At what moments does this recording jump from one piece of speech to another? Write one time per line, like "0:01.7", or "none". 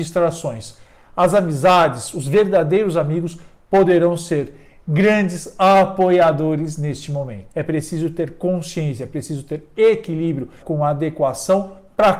0:07.5
0:10.6

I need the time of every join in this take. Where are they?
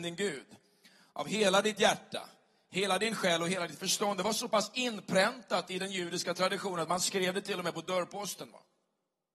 none

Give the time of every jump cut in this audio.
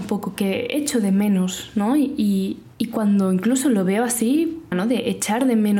0:04.7

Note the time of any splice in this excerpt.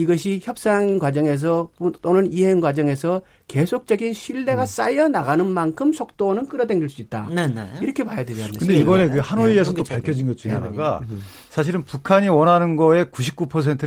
none

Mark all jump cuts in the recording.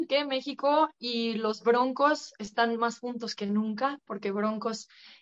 none

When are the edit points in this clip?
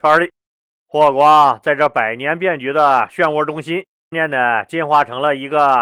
0:04.1

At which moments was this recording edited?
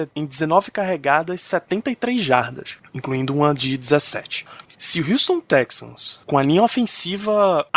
none

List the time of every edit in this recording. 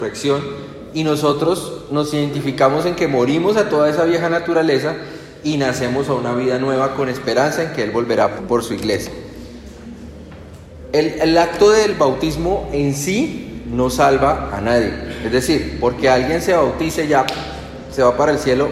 0:08.4

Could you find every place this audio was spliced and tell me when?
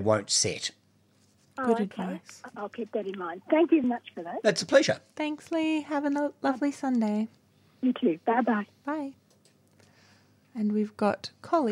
0:03.8

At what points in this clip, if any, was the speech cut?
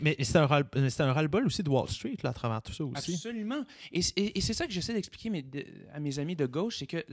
none

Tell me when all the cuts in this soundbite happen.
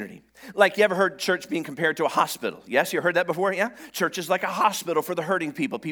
none

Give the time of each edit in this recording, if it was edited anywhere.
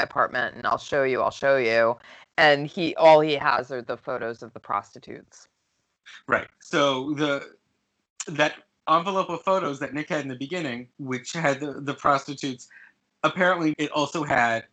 0:10.9
0:13.7

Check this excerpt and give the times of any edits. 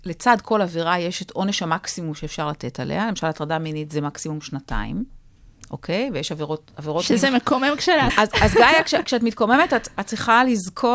0:08.1

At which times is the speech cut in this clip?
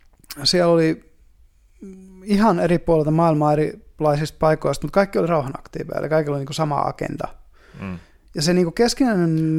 none

